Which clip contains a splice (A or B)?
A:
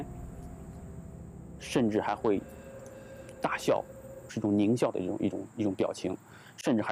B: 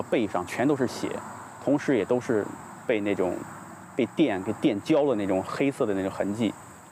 A